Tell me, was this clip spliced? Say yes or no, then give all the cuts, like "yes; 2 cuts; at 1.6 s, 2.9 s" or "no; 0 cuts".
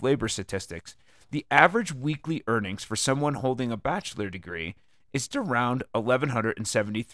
yes; 1 cut; at 5.3 s